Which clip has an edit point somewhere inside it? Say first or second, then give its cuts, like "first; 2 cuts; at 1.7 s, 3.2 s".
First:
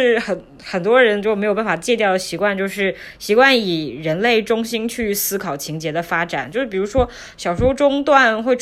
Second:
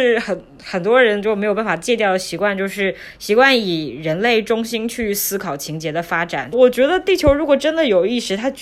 second; 1 cut; at 6.5 s